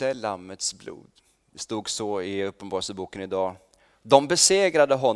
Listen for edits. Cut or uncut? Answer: uncut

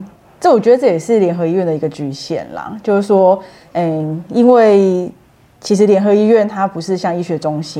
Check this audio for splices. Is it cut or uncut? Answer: uncut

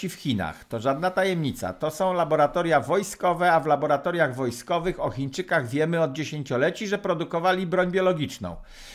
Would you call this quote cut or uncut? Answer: uncut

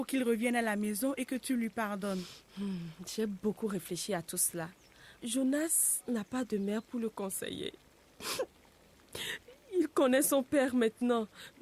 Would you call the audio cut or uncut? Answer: uncut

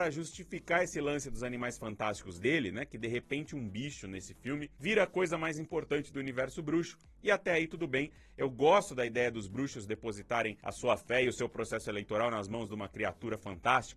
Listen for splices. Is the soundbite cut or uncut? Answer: uncut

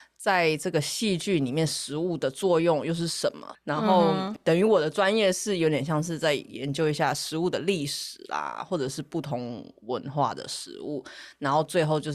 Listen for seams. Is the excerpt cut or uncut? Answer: cut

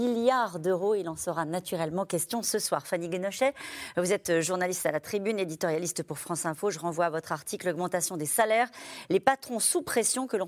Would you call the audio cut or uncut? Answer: uncut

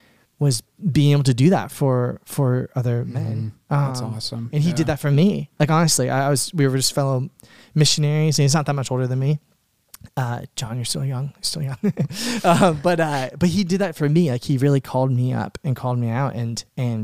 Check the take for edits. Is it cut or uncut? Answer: uncut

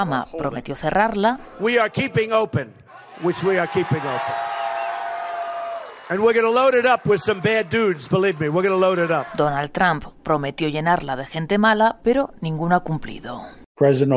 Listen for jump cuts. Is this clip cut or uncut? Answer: uncut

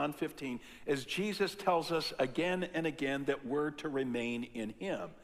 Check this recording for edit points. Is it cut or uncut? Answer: uncut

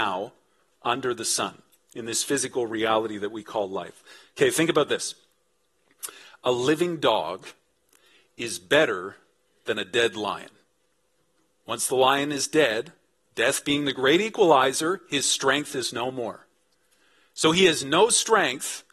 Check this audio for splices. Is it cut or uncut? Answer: cut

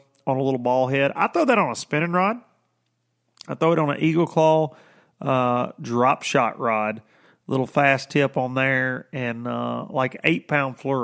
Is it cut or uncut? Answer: uncut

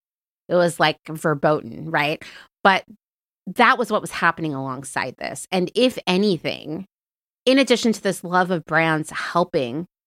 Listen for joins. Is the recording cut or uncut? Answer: uncut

